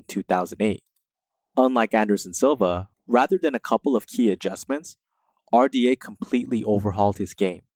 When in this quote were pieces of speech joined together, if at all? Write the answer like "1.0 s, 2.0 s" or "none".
2.9 s